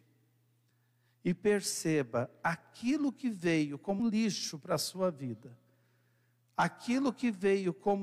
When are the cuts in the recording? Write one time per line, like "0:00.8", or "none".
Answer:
0:04.0